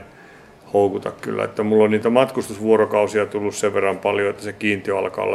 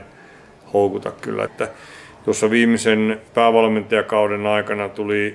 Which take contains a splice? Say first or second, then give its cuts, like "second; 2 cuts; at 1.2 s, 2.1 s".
second; 2 cuts; at 1.5 s, 3.3 s